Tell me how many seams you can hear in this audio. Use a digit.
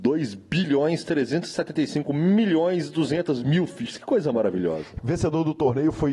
1